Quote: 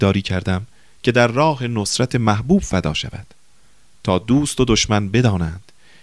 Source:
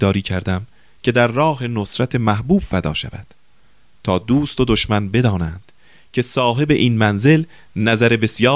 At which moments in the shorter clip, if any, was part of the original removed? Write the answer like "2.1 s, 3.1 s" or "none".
none